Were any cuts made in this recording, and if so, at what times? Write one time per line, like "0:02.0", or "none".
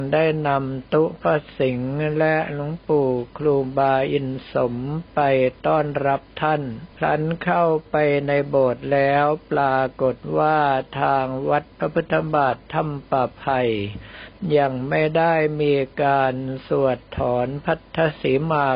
0:06.9